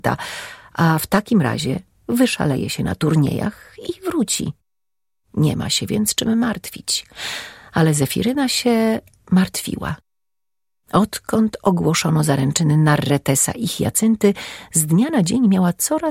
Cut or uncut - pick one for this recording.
uncut